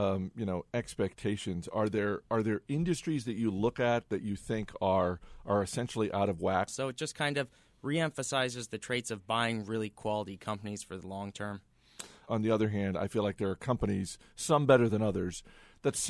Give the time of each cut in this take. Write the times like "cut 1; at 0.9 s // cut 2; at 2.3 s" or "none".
cut 1; at 6.7 s // cut 2; at 12.3 s